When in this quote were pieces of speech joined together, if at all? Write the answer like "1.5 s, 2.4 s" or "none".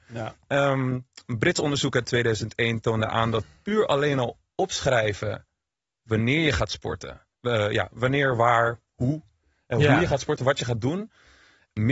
7.3 s